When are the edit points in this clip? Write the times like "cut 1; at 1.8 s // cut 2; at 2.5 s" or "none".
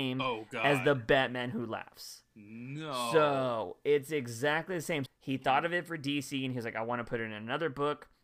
cut 1; at 5.1 s